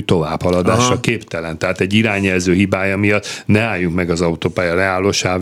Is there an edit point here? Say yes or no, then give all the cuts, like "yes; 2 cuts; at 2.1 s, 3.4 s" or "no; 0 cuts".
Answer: no; 0 cuts